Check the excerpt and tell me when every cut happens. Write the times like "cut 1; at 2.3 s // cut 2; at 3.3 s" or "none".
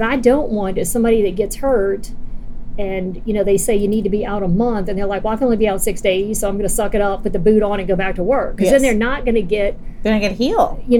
none